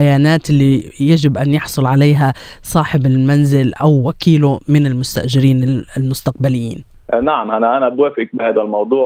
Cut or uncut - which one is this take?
uncut